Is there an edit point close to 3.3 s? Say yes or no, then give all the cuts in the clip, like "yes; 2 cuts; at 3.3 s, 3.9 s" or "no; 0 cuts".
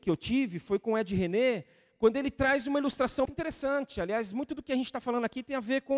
yes; 1 cut; at 3.3 s